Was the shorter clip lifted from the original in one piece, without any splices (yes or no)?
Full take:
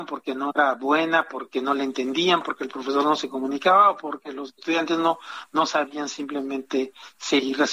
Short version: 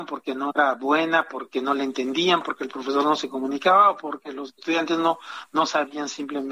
yes